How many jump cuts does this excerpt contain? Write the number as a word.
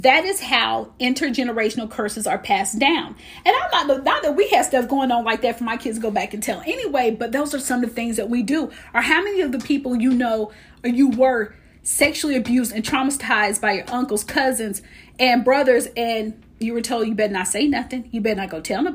zero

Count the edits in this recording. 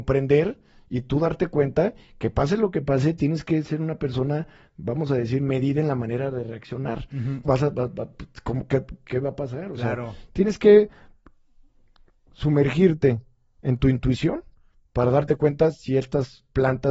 one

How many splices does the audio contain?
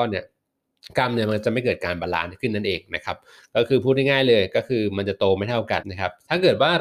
one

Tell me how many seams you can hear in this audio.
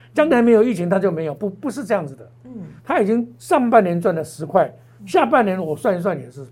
one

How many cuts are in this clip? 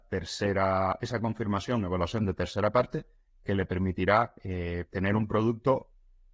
zero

